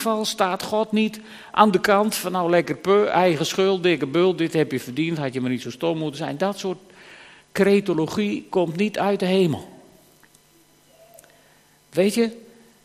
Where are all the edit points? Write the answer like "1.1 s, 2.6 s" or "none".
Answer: none